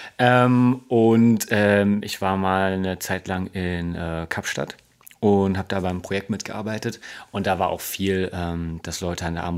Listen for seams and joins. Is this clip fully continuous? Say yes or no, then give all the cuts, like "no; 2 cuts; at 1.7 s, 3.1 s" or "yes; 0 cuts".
yes; 0 cuts